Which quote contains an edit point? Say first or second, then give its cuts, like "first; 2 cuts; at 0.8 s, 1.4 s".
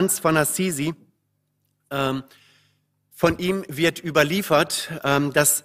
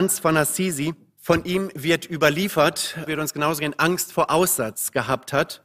second; 2 cuts; at 1.1 s, 3.1 s